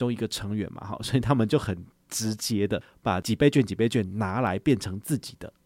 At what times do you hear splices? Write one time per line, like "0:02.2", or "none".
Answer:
none